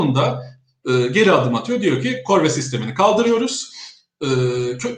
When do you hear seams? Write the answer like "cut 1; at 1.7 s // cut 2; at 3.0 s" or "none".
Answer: none